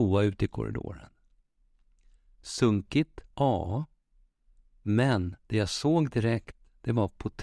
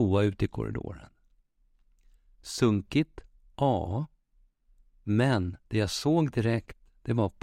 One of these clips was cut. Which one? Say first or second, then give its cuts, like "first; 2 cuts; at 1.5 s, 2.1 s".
first; 1 cut; at 3.3 s